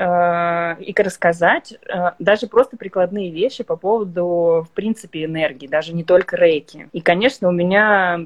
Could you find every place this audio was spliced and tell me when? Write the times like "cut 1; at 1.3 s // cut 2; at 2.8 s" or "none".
cut 1; at 6.9 s